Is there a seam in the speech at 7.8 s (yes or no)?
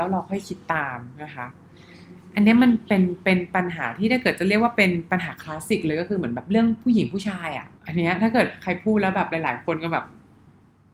yes